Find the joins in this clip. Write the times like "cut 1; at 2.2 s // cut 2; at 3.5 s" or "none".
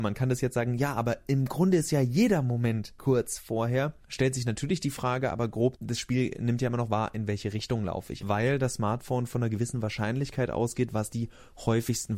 cut 1; at 8.2 s